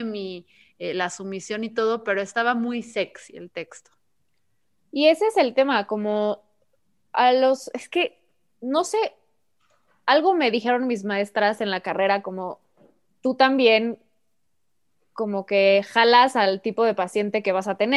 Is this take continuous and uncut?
yes; 0 cuts

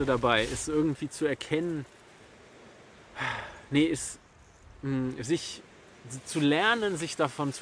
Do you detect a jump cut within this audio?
no; 0 cuts

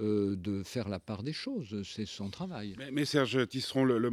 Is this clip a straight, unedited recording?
no; 1 cut; at 3.1 s

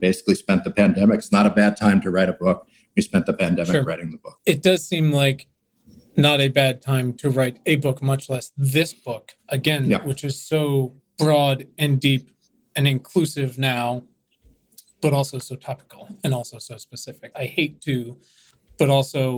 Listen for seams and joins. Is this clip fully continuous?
no; 1 cut; at 17.3 s

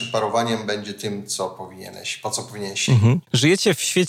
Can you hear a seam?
no; 0 cuts

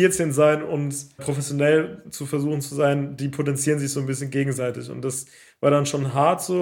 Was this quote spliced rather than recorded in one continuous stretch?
yes; 1 cut; at 1.2 s

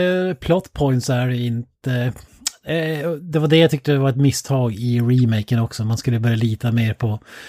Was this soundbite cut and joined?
no; 0 cuts

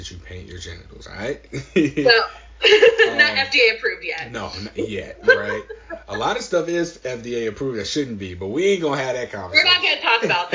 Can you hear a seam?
no; 0 cuts

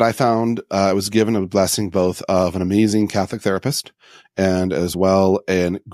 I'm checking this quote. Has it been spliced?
no; 0 cuts

